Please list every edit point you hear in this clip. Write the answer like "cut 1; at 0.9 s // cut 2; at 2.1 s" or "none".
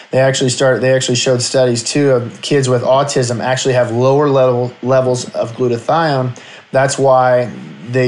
none

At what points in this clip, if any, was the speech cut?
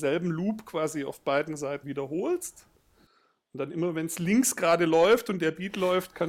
cut 1; at 1.8 s

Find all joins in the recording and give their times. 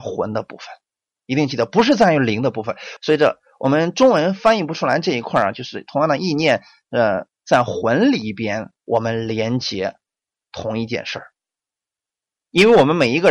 cut 1; at 3.0 s // cut 2; at 7.3 s // cut 3; at 8.8 s

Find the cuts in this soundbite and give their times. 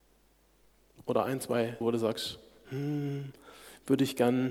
cut 1; at 1.8 s

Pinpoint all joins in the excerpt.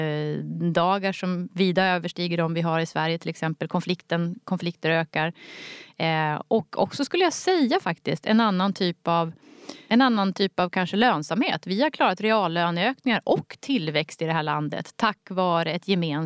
none

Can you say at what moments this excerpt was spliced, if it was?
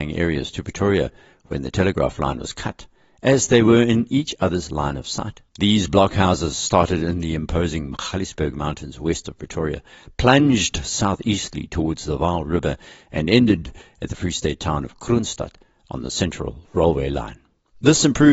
cut 1; at 5.5 s

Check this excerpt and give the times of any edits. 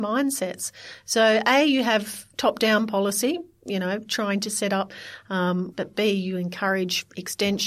cut 1; at 5.7 s

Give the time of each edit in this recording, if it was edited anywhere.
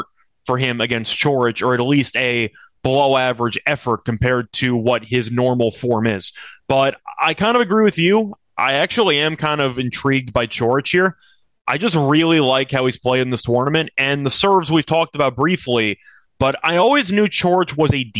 none

